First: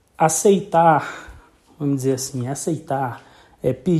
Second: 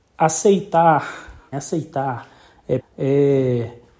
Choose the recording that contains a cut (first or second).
second